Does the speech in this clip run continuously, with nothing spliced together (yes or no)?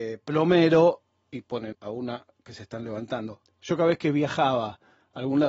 no